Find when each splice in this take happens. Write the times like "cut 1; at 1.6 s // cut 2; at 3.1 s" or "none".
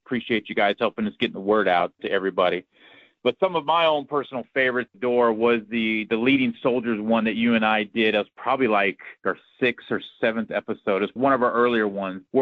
cut 1; at 4.9 s